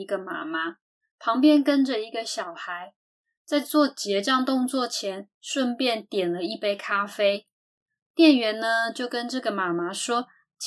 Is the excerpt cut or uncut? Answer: uncut